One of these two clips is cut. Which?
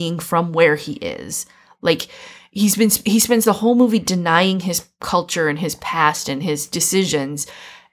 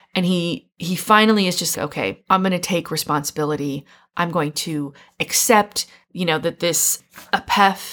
second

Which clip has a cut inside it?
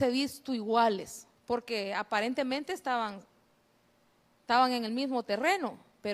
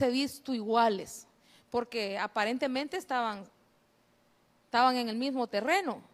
first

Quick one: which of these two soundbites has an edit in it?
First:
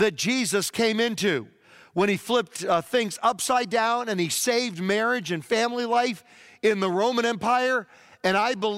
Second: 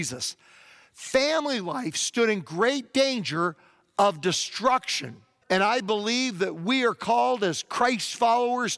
second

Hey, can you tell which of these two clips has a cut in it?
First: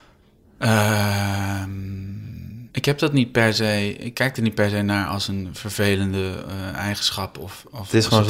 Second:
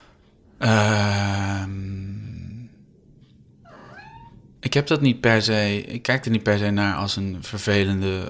first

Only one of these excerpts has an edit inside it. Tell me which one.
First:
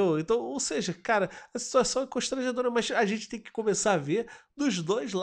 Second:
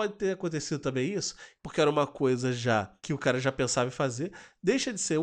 second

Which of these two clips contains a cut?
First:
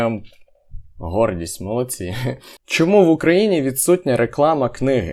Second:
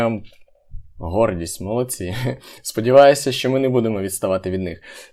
first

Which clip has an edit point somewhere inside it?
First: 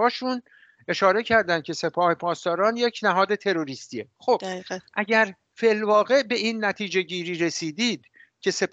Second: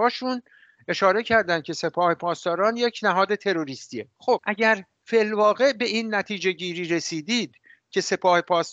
second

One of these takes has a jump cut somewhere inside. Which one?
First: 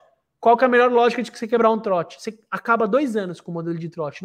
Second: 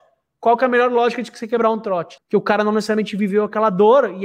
second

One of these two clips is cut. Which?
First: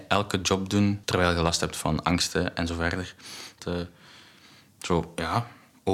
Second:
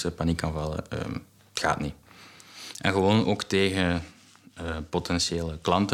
first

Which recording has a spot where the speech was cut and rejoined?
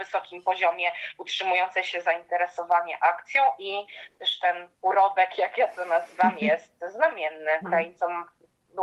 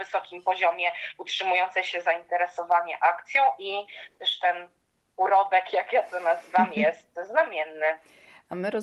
first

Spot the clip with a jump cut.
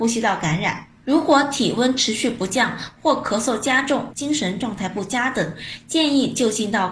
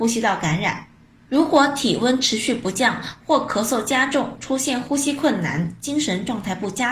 first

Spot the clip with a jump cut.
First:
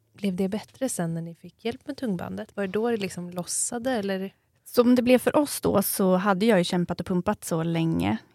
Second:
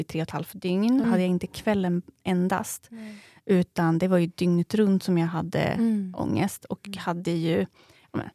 second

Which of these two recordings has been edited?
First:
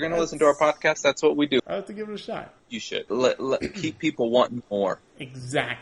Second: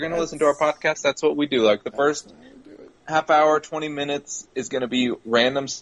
first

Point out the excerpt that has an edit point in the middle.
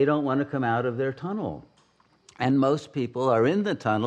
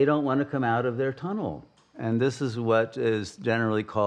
second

